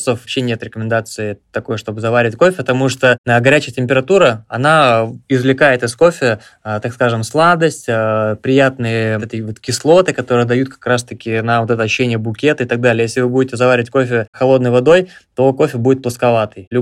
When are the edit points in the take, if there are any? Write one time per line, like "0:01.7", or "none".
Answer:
0:09.2